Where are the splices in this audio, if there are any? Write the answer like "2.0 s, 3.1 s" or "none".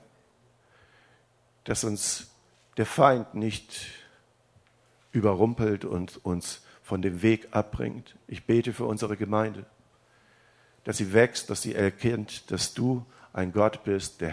none